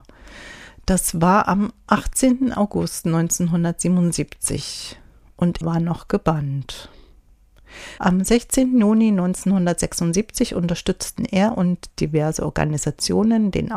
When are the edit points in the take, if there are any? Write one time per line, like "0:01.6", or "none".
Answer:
0:05.6
0:08.0